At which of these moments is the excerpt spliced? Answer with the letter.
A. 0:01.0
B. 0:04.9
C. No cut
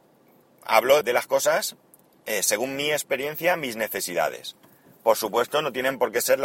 A